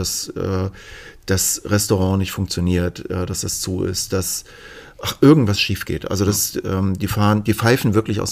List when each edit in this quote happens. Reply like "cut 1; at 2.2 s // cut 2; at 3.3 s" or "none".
none